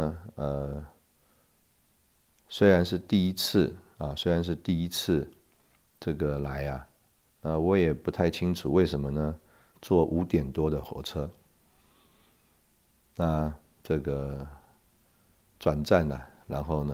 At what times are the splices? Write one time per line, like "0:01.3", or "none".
0:09.7